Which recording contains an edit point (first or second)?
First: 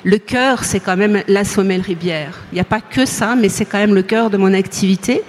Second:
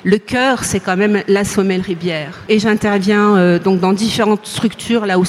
second